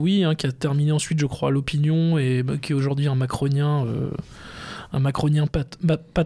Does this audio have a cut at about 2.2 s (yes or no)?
no